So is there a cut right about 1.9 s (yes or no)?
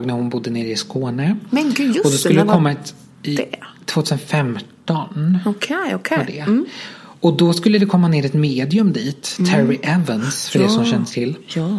no